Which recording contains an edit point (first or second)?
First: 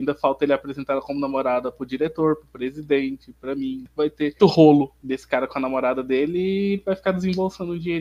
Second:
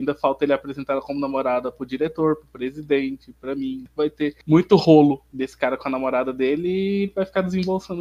first